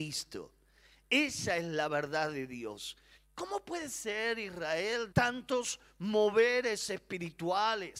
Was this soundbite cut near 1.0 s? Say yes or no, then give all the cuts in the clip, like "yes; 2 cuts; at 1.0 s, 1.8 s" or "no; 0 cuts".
no; 2 cuts; at 3.2 s, 5.1 s